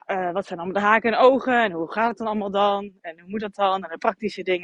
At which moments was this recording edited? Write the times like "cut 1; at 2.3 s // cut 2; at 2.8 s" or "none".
none